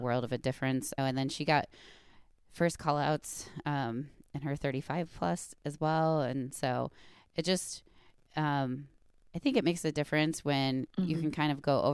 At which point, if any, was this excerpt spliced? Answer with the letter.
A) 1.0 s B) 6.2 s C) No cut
A